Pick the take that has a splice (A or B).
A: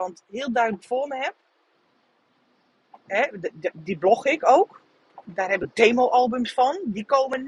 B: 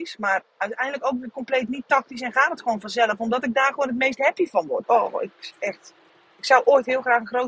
B